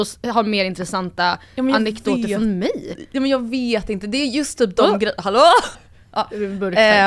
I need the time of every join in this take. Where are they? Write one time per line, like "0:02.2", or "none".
0:04.6
0:05.8